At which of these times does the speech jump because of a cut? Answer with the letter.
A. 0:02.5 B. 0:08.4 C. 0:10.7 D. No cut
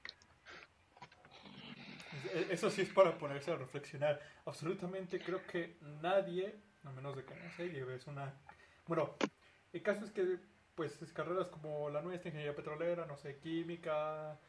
D